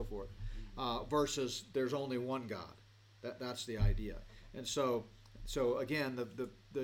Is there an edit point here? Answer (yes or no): no